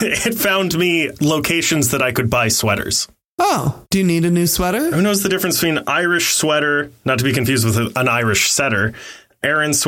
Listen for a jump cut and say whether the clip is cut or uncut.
uncut